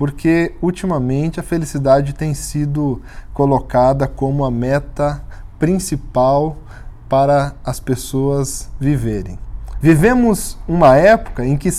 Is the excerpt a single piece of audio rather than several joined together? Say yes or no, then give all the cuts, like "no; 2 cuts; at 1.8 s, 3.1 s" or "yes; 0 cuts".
no; 1 cut; at 9.8 s